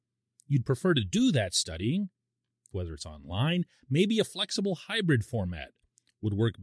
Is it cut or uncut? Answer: cut